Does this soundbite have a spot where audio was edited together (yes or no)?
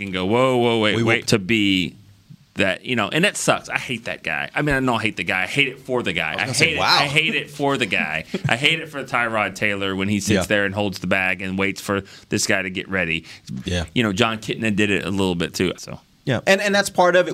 yes